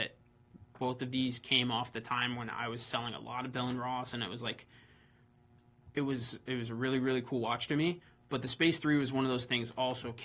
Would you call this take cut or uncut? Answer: uncut